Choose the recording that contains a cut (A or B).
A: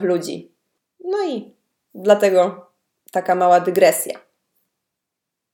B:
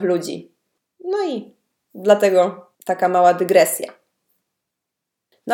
B